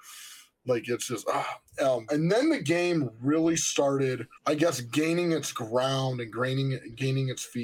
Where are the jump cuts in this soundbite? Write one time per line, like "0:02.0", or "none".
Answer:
0:02.1
0:04.4